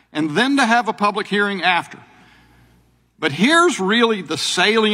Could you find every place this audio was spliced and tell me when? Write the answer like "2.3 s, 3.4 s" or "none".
3.1 s

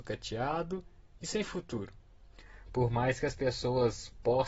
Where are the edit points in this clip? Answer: 2.7 s

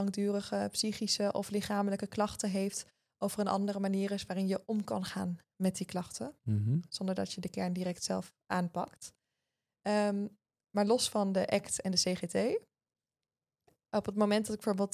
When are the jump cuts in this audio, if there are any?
none

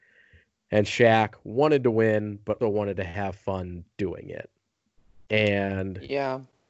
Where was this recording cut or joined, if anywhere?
2.6 s

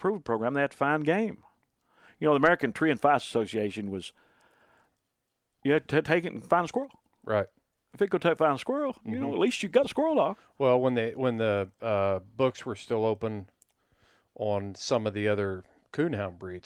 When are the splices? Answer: none

